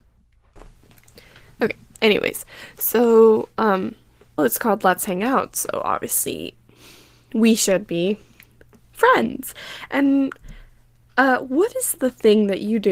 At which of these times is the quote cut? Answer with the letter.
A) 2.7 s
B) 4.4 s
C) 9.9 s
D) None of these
B